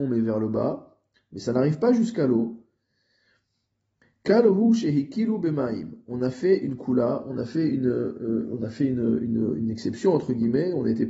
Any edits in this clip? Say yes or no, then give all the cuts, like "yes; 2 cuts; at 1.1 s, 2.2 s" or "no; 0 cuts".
no; 0 cuts